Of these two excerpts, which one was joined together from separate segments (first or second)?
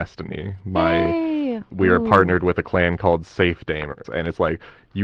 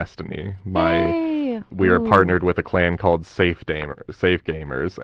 first